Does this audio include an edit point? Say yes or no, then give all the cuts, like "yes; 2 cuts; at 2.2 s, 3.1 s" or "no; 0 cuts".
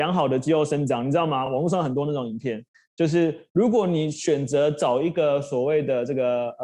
no; 0 cuts